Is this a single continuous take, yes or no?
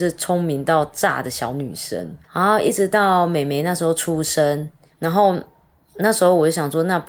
no